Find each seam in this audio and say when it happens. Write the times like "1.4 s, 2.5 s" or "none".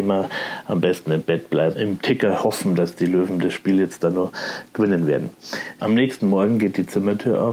1.7 s, 5.8 s